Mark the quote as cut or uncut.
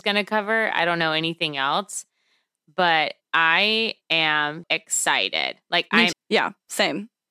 cut